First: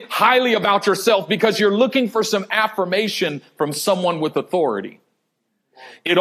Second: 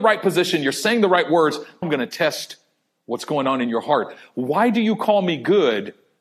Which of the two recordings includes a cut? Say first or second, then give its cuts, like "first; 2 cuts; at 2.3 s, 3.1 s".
second; 1 cut; at 1.8 s